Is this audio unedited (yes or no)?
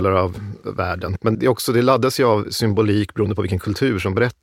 no